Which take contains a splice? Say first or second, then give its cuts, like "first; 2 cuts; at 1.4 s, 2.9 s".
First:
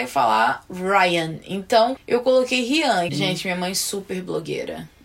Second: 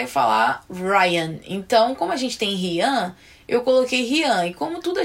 first; 2 cuts; at 2.0 s, 3.1 s